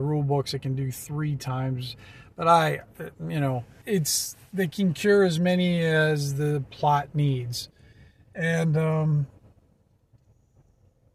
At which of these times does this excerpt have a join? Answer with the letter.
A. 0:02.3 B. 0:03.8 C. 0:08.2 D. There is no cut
B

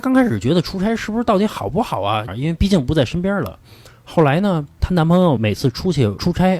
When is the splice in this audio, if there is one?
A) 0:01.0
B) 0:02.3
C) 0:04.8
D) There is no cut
B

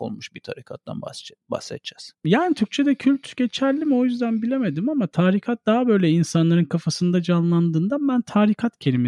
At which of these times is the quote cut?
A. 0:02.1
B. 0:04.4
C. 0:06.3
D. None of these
A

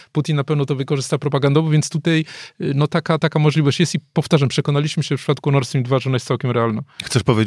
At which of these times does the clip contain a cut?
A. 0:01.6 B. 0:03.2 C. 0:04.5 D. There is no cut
B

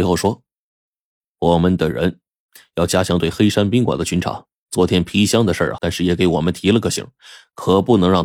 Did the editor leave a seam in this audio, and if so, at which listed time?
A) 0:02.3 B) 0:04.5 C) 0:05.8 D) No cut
C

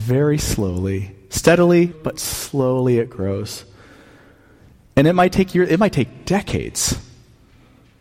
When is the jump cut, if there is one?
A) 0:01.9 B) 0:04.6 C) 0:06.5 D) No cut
A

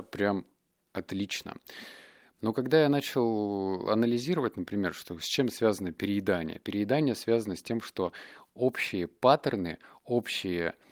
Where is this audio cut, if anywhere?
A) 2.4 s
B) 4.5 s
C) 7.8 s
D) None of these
A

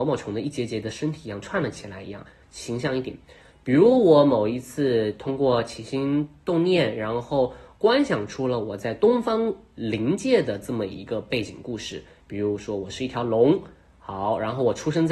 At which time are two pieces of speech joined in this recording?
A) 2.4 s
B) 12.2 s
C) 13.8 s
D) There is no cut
A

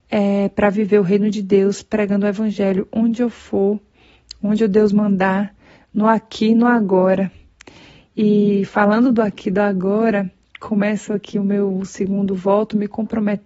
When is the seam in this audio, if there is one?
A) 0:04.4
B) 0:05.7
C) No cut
C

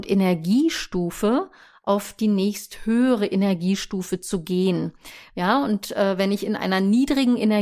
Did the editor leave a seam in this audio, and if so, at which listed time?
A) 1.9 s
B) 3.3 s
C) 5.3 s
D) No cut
C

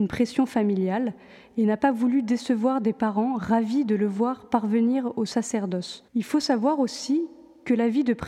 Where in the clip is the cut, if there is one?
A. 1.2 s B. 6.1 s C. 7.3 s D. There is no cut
B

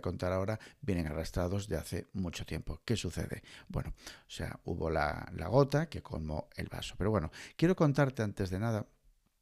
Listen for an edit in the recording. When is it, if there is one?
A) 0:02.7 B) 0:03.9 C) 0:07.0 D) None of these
B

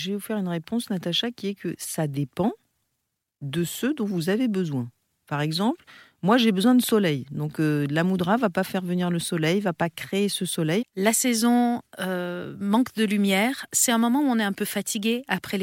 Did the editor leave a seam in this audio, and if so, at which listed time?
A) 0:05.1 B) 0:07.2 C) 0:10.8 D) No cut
C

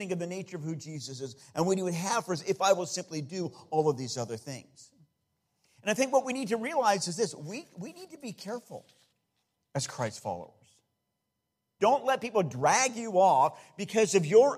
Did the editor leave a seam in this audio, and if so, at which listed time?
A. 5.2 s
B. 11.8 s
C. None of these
B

